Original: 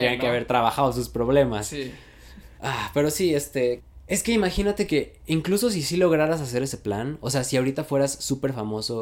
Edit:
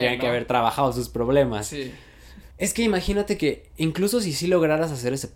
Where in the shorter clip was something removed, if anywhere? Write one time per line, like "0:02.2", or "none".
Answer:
0:02.5